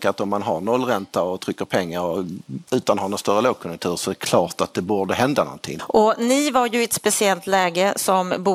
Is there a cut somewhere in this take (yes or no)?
yes